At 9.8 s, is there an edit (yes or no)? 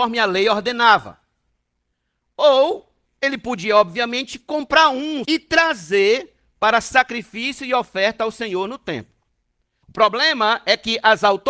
yes